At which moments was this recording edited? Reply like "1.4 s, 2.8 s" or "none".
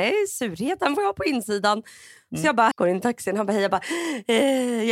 2.7 s